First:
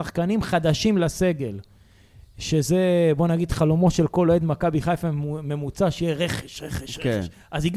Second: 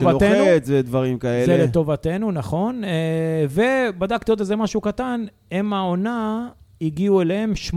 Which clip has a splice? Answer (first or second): first